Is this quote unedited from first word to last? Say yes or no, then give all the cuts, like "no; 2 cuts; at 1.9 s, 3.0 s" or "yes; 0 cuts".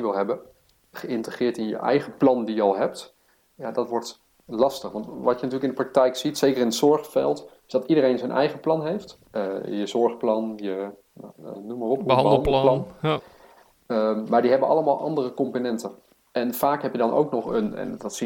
yes; 0 cuts